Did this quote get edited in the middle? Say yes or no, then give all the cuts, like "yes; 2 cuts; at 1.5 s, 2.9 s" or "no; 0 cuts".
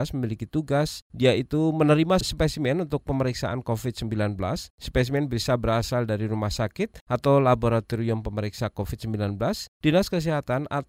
no; 0 cuts